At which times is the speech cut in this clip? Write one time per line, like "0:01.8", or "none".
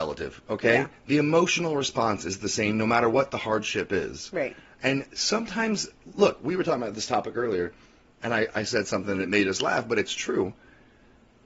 none